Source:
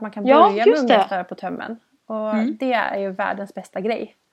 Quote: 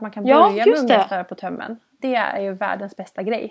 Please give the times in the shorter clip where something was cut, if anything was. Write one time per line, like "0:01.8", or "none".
0:02.0